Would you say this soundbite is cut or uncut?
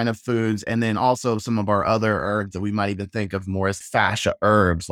uncut